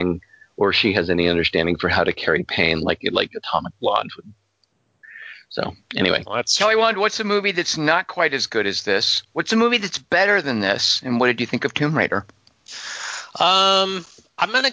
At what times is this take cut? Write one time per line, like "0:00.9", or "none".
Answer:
none